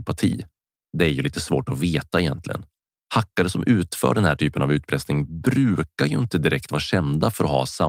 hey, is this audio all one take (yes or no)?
yes